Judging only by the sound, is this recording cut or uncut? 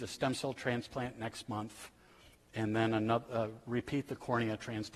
uncut